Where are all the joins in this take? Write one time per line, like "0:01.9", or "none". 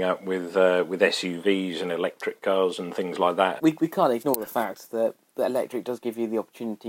0:03.6

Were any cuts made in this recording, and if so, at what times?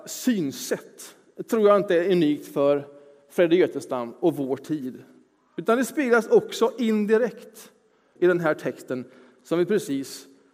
0:08.2

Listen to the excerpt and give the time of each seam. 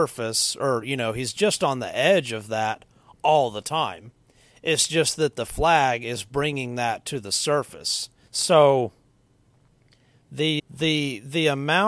0:08.3
0:10.6

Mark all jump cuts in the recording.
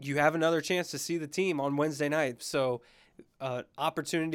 0:02.4

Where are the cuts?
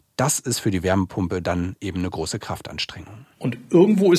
none

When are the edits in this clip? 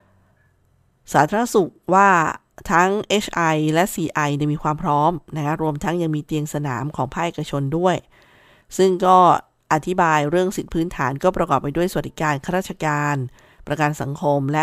none

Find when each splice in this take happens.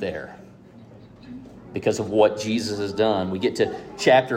none

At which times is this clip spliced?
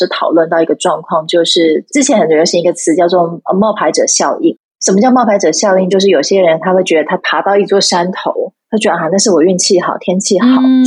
none

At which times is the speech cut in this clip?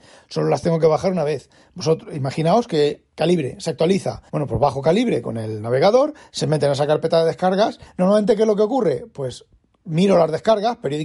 0:04.3
0:07.9

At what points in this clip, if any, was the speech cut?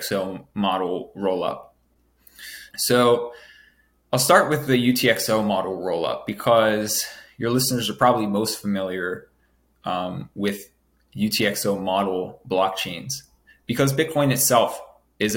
0:02.7

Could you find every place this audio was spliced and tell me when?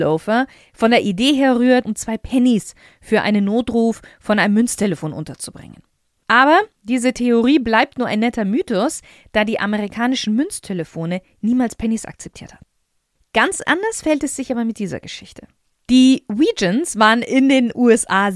0:01.8

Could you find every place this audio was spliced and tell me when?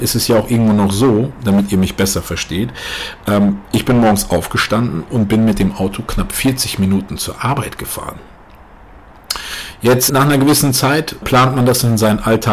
0:10.1
0:11.2

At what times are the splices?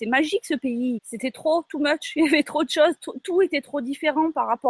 0:01.0

